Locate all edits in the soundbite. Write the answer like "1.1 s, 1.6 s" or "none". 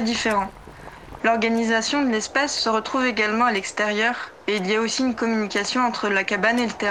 1.2 s